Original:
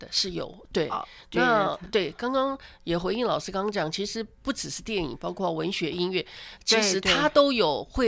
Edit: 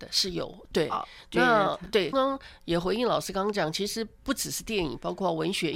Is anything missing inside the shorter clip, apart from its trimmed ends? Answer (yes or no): yes